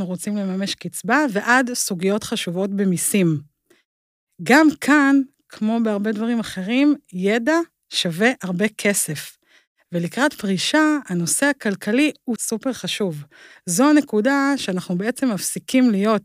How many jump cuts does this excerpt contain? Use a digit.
1